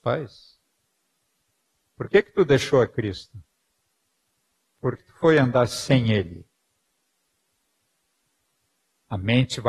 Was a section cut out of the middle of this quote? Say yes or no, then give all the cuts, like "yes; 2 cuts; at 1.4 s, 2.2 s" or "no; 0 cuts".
yes; 1 cut; at 5.0 s